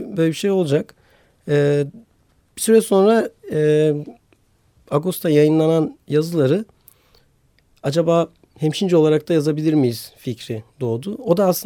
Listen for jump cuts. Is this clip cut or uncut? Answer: uncut